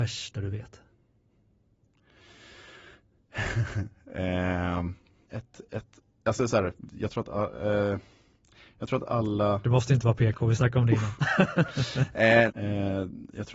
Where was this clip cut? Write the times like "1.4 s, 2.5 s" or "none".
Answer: 5.3 s, 12.5 s

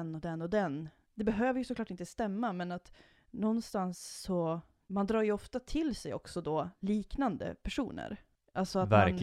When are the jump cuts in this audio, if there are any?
1.0 s, 4.8 s

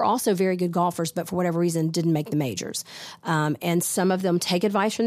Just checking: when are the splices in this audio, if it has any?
3.2 s

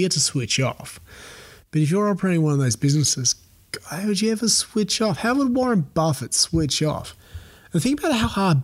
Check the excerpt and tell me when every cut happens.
none

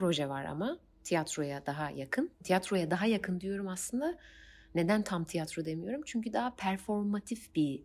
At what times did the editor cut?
2.3 s

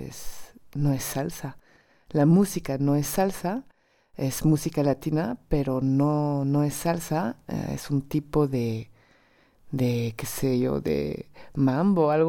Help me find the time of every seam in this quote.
none

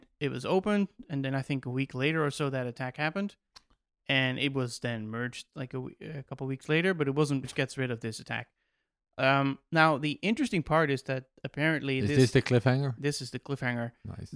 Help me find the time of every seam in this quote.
7.4 s

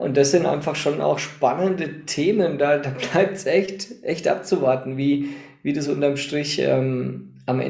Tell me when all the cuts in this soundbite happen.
none

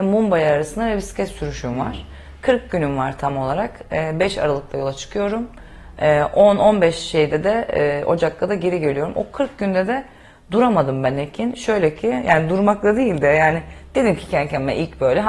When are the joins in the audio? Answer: none

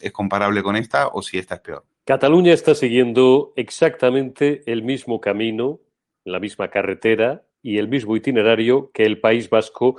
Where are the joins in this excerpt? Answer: 1.9 s

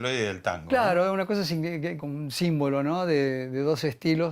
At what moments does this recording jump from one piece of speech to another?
2.0 s

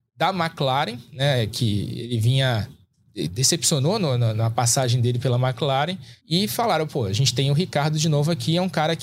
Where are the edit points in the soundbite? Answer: 6.2 s

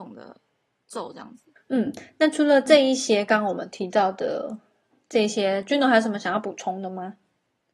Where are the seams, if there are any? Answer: 1.6 s

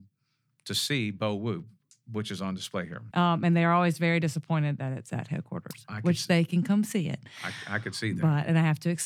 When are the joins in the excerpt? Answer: 3.1 s

